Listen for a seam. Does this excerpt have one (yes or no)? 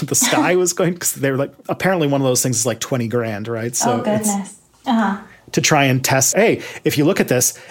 yes